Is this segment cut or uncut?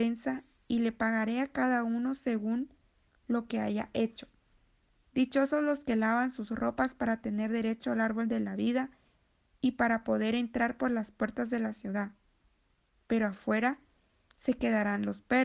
cut